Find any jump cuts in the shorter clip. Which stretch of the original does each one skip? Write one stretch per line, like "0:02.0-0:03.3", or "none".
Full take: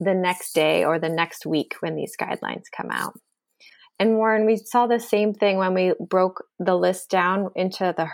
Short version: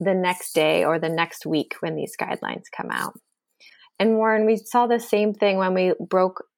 none

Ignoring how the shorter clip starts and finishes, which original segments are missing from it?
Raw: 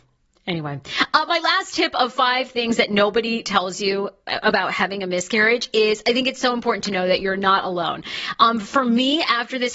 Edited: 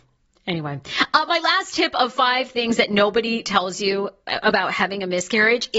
none

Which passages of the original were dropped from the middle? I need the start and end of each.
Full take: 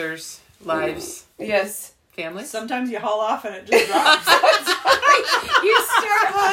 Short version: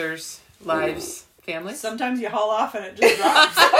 0:01.4-0:02.1

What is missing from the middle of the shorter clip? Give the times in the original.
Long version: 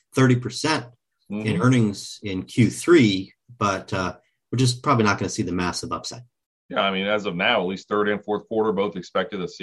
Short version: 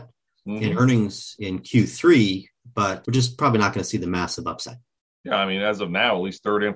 0:03.9-0:04.5

